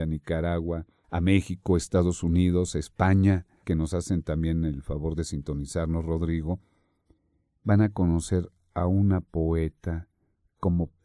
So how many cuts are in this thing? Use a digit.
1